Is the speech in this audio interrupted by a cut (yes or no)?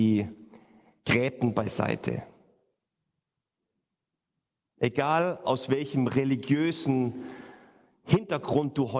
no